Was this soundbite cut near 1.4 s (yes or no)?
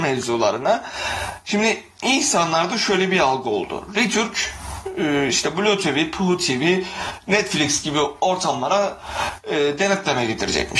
no